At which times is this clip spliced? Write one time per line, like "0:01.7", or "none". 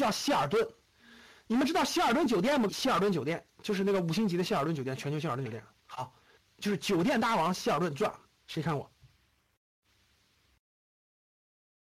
0:02.7
0:06.4